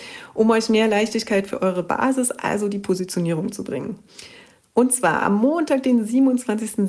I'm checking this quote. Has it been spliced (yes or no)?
no